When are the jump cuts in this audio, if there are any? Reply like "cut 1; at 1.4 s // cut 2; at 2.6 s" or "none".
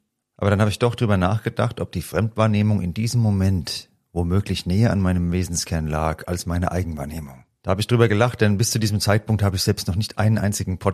cut 1; at 7.6 s